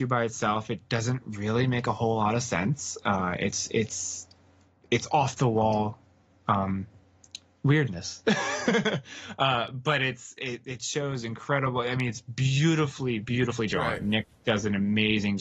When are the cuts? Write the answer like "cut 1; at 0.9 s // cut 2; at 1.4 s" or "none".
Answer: none